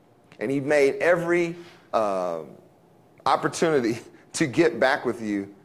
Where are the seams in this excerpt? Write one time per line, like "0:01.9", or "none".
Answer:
0:01.9